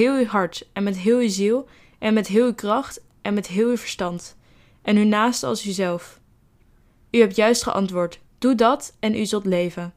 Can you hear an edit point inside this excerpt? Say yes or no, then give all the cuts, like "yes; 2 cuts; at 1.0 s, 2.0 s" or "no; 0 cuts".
yes; 1 cut; at 8.2 s